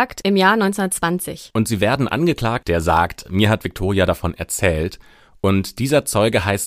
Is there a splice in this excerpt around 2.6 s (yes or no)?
yes